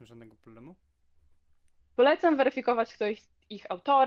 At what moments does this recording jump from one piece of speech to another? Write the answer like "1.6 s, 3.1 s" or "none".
1.8 s

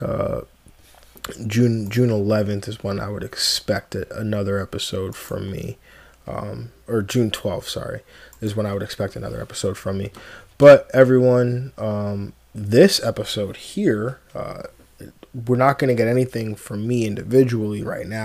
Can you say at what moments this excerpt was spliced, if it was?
none

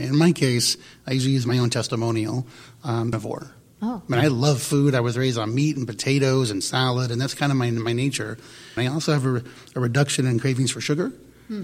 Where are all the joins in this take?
3.1 s, 8.8 s

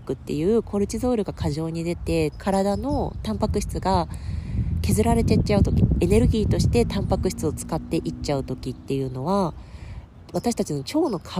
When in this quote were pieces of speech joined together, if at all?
2.3 s

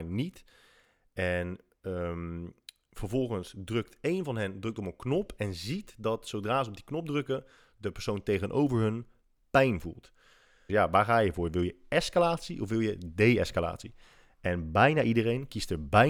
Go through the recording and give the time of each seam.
10.7 s

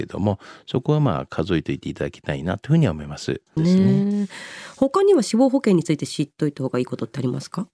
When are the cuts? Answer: 3.6 s

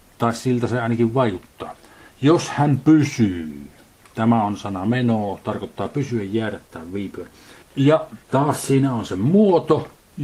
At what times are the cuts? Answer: none

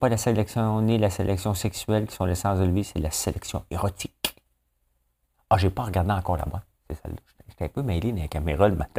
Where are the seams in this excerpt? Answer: 5.3 s

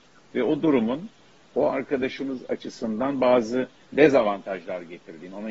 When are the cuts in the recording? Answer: none

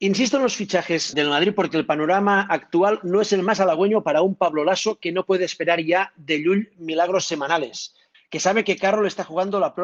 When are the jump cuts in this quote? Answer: 1.1 s, 8.1 s

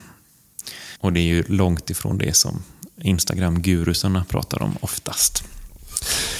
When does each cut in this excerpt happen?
1.0 s

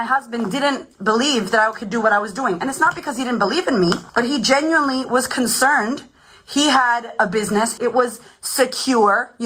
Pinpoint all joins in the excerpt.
4.1 s, 7.8 s

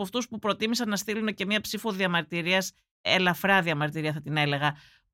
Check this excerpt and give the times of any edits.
none

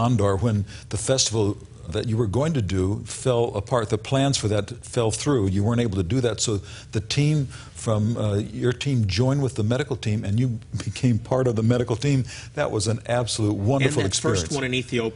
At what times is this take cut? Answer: 1.9 s

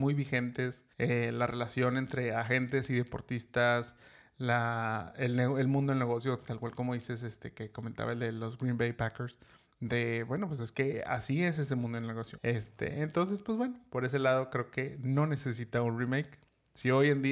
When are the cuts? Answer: 0.9 s, 12.4 s

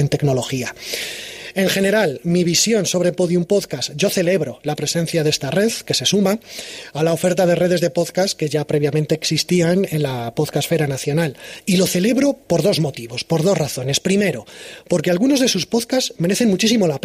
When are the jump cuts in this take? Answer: none

